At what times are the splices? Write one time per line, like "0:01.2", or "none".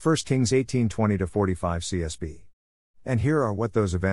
0:02.9